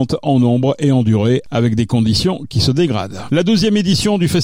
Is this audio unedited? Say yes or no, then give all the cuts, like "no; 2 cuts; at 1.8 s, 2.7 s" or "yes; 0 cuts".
no; 1 cut; at 3.3 s